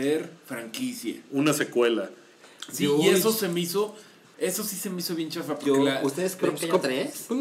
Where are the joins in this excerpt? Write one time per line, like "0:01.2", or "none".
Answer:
none